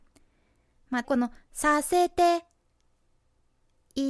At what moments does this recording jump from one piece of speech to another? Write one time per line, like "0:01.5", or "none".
0:01.0